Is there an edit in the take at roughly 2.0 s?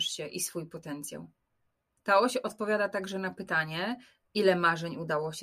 yes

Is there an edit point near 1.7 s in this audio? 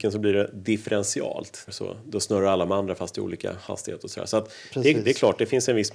yes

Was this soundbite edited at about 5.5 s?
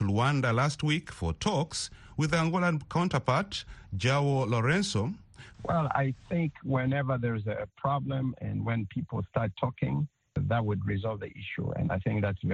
yes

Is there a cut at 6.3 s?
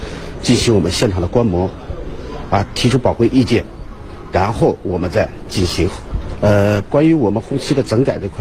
yes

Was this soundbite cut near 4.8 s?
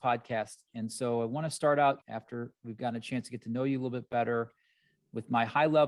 no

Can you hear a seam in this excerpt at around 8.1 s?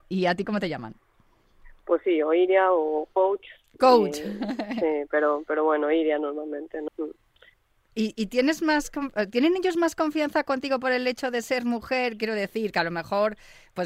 no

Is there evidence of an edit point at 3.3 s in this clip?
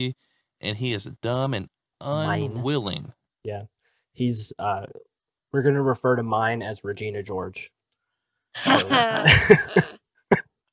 yes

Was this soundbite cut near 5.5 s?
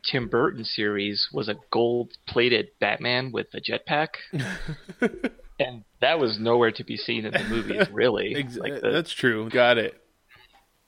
no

